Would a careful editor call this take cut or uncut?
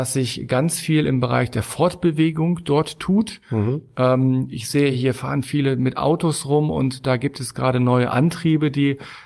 uncut